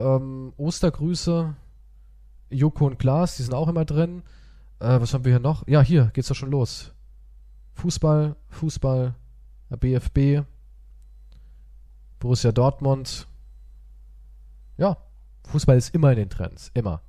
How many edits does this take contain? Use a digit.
0